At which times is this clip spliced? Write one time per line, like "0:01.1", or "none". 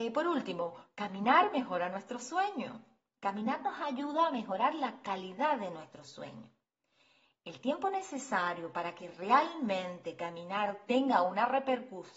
none